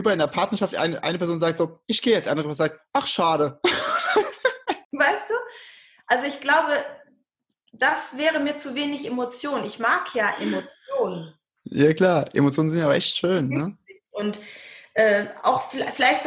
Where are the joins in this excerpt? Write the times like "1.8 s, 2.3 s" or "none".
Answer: 4.8 s